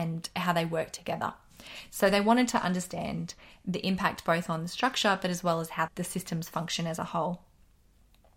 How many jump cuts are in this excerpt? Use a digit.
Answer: 1